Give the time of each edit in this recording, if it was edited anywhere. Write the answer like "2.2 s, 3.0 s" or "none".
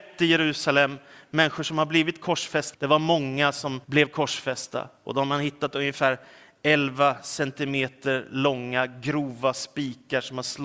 2.7 s, 3.8 s